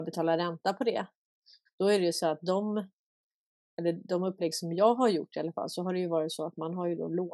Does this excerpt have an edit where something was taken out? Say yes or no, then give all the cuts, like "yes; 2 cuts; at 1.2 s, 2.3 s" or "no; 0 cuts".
yes; 1 cut; at 1.7 s